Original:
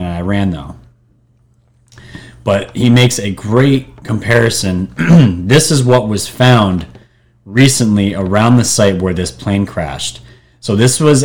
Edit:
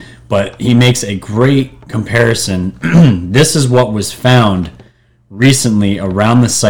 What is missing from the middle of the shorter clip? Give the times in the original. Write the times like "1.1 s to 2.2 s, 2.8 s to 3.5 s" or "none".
none